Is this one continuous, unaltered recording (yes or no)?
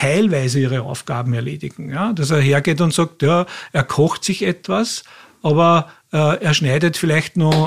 yes